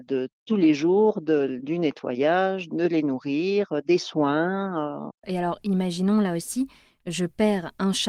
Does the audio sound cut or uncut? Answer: cut